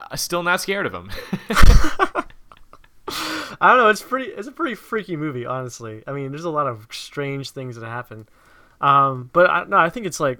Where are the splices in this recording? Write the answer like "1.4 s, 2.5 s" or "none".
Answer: none

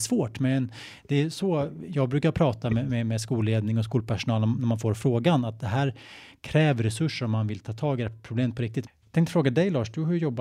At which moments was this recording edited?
8.9 s

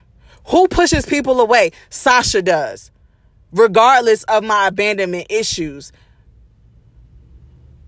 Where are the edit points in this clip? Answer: none

